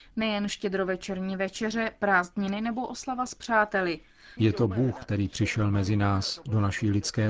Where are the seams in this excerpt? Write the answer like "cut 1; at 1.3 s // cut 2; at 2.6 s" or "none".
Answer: cut 1; at 4.4 s